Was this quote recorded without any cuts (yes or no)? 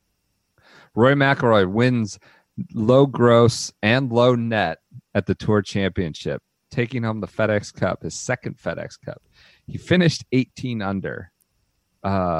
yes